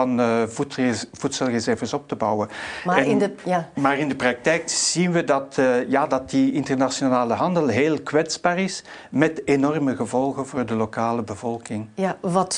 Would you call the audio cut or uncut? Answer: uncut